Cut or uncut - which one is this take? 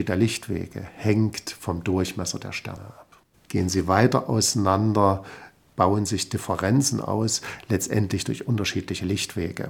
cut